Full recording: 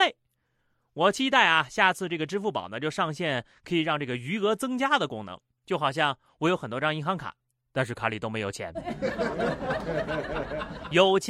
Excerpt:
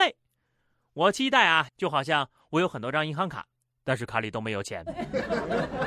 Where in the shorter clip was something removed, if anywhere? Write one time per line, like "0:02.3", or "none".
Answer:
0:01.7

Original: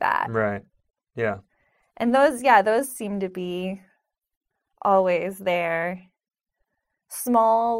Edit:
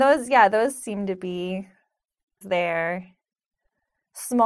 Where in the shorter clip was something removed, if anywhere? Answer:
0:02.4

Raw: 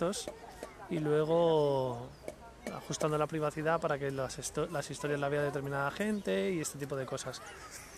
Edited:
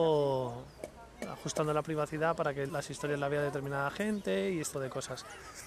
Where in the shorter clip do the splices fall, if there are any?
0:02.7
0:04.7

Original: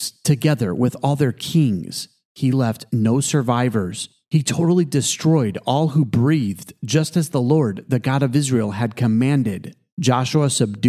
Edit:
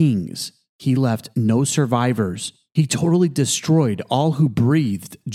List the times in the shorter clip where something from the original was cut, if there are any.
none

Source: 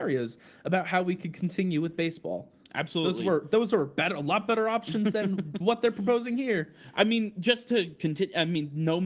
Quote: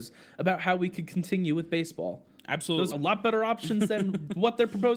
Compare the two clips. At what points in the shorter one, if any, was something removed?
0:02.9

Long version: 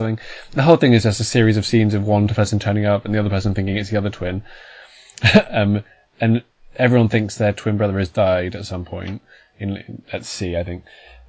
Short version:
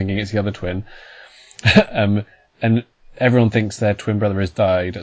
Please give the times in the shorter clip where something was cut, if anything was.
none

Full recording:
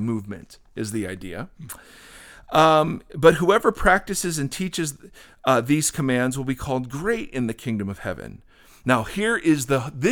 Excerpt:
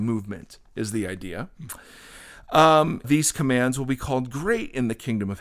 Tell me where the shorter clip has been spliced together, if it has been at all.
0:03.0

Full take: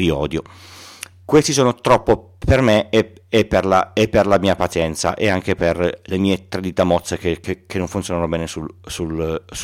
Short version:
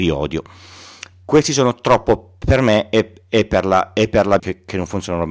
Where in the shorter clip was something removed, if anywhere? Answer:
0:04.4

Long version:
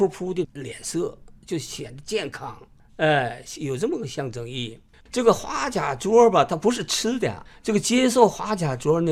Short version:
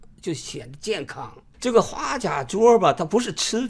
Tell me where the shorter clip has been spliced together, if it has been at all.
0:01.5

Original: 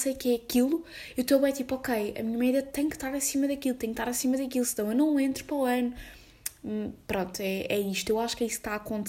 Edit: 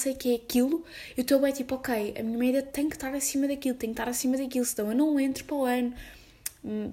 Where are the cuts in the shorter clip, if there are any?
none

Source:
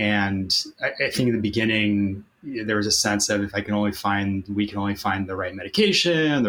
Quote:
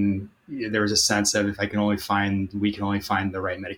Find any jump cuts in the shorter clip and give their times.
none

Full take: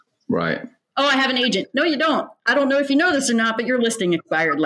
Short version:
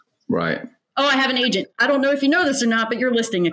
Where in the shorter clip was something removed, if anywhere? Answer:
0:01.7

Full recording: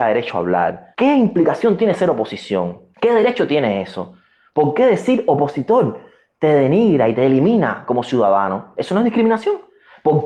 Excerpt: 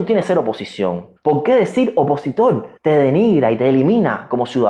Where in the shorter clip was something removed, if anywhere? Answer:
0:01.2
0:02.8

